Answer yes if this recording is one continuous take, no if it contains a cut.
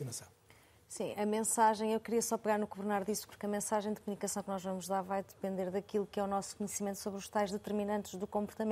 no